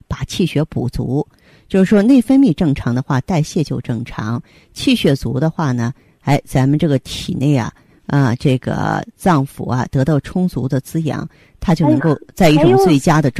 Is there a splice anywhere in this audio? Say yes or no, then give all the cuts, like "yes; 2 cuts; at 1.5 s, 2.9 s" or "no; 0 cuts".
no; 0 cuts